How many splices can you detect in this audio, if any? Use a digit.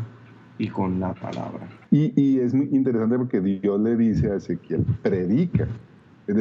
1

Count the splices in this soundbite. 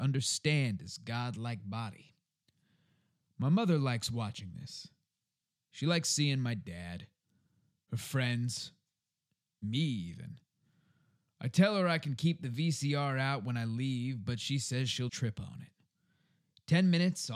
1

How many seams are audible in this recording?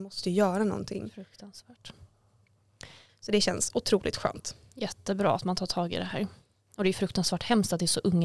1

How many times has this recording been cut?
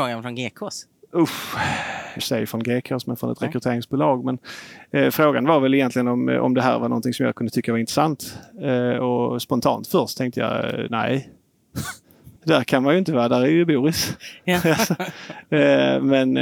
2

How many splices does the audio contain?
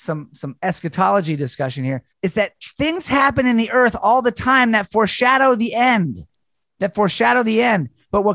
1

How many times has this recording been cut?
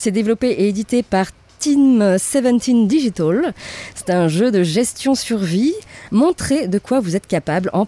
1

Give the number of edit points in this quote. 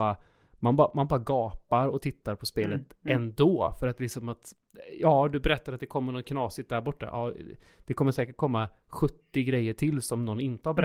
0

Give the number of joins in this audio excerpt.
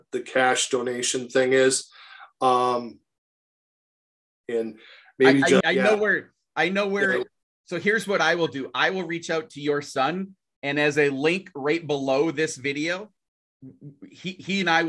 1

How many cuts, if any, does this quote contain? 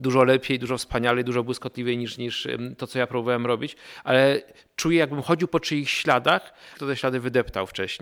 1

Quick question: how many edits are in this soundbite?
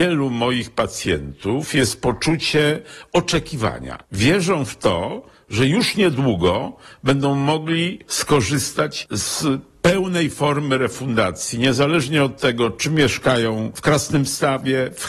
0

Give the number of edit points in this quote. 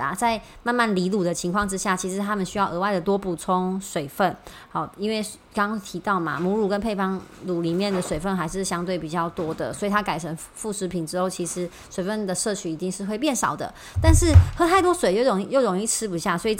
0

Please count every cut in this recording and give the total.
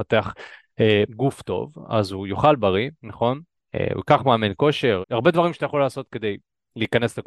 3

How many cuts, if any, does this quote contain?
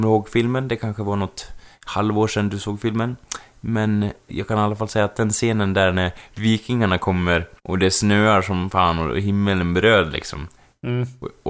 2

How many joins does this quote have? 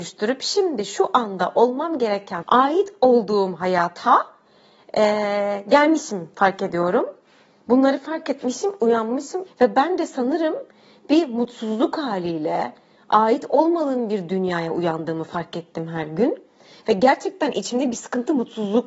2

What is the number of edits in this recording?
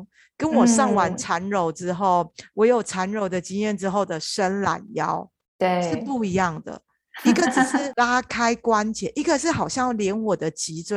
0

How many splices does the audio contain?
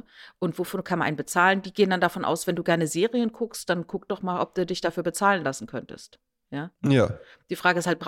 0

